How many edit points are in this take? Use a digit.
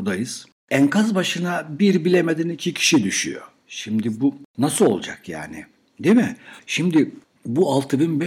1